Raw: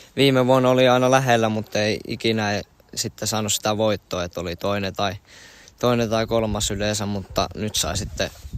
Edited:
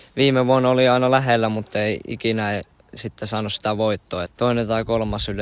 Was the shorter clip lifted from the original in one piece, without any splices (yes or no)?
no